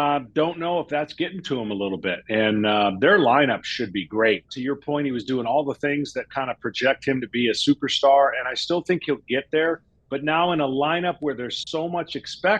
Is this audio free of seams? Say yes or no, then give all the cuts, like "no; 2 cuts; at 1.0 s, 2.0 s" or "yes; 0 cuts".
no; 1 cut; at 4.5 s